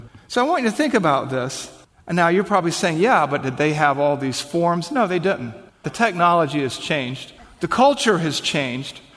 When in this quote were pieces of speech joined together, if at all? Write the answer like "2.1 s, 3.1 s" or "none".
5.8 s

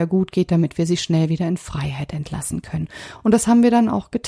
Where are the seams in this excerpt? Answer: none

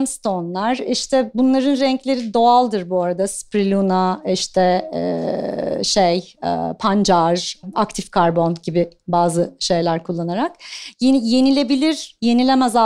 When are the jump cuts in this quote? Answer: none

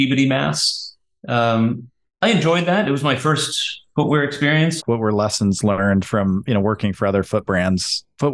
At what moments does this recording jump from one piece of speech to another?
4.8 s

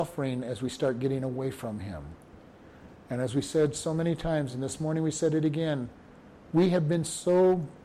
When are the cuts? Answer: none

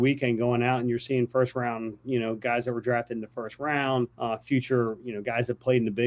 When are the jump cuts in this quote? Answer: 4.1 s

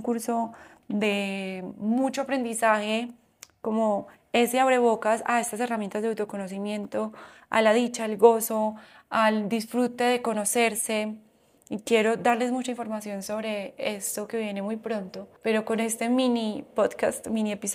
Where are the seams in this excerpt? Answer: 15.4 s

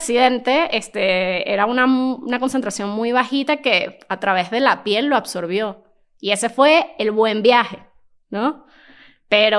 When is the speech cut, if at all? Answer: none

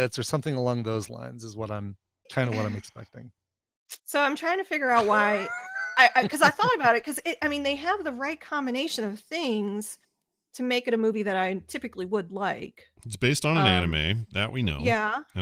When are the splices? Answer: 2.3 s, 4.0 s

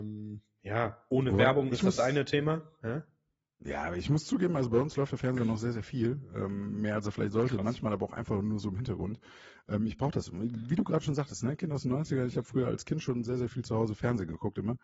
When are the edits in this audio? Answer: none

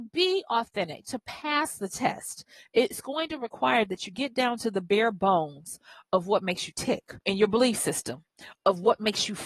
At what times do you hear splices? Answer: 7.2 s

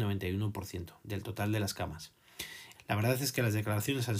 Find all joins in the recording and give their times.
2.7 s

